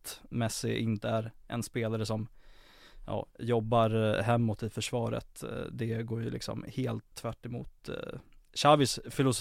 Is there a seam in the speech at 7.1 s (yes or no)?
yes